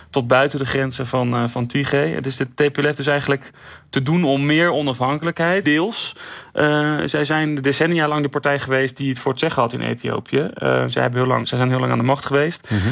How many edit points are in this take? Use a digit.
2